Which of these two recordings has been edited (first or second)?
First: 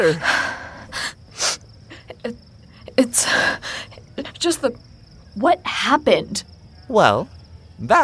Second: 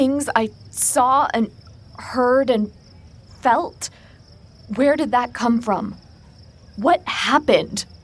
first